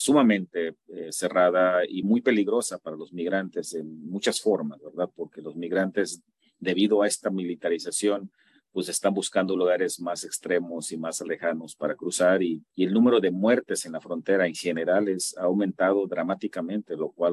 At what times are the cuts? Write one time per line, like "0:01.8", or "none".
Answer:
none